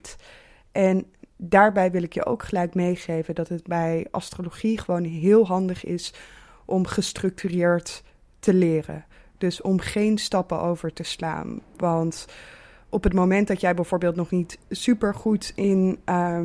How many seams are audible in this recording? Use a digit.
0